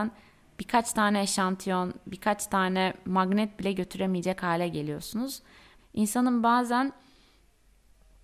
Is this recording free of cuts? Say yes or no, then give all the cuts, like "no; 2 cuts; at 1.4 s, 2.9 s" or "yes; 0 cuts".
no; 1 cut; at 5.8 s